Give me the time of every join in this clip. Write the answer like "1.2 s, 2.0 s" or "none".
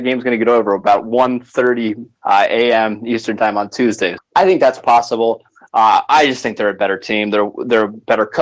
2.2 s, 4.2 s